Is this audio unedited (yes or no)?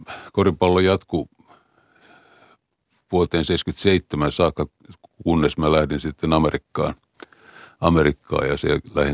yes